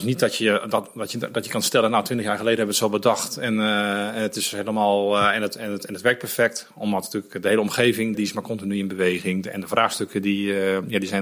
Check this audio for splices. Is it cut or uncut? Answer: cut